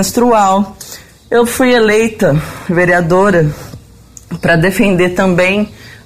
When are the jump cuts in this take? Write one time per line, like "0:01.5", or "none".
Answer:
none